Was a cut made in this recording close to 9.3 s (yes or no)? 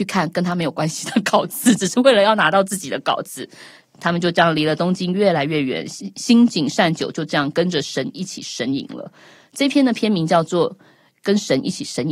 no